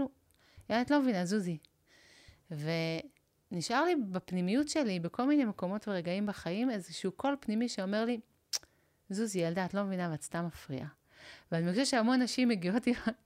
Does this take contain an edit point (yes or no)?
no